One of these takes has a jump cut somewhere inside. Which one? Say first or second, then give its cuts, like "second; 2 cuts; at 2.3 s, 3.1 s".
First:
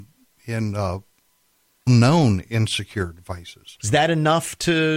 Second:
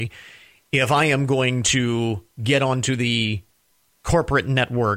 first; 2 cuts; at 1.9 s, 3.8 s